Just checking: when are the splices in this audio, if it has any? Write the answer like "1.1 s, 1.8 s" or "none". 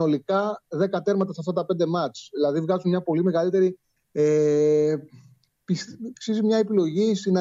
4.0 s, 6.1 s